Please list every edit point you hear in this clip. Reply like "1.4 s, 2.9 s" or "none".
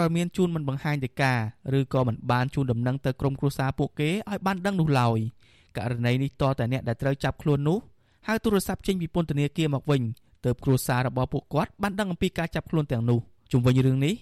none